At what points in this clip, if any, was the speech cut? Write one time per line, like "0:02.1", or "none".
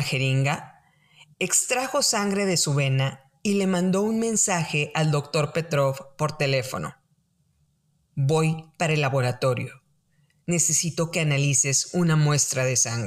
none